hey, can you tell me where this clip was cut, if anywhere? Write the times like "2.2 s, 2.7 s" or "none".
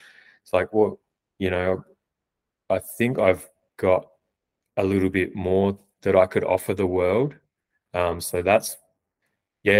7.9 s